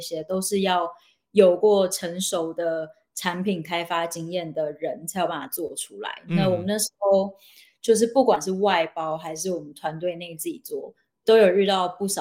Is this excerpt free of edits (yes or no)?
yes